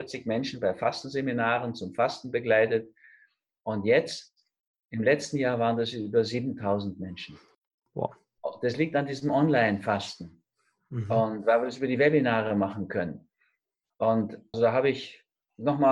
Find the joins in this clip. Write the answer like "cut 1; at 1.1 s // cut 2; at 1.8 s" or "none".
cut 1; at 14.5 s